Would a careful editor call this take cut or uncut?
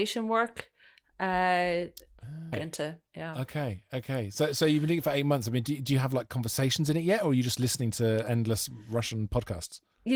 cut